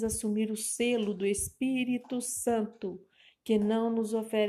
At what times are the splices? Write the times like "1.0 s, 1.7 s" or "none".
none